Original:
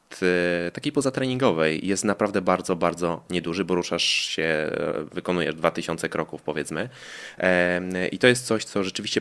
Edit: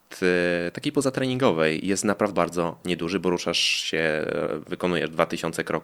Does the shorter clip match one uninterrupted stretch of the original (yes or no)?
no